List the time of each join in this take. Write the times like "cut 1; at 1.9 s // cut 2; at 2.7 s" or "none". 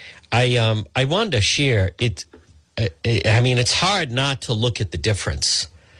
none